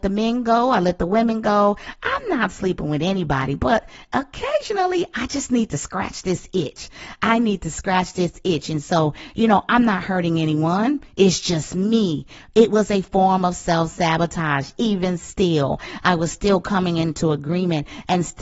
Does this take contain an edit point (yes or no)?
no